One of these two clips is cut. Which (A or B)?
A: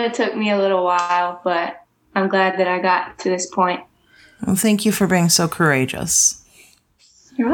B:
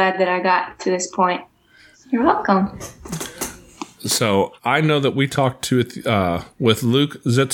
B